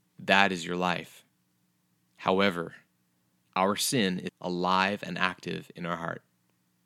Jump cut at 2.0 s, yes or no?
yes